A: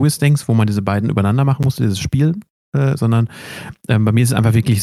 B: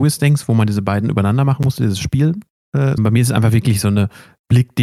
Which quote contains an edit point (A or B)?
B